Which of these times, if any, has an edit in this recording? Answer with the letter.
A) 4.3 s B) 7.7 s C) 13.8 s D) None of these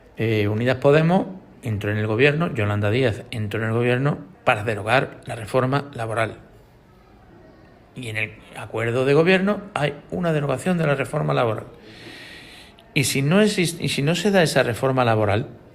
A